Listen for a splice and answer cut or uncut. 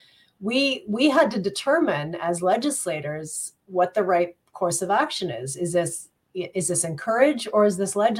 uncut